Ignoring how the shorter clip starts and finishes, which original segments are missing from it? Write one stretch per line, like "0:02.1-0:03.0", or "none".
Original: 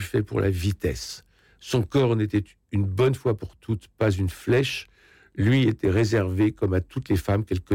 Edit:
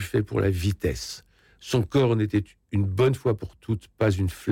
none